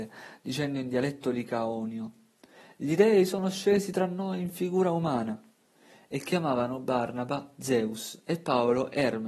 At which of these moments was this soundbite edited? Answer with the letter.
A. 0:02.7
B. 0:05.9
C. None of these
C